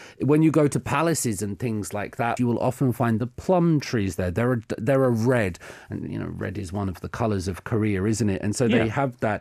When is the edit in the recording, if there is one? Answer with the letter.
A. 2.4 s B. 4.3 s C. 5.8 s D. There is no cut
A